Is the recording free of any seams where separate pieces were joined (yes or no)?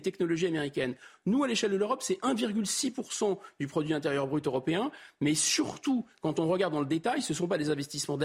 yes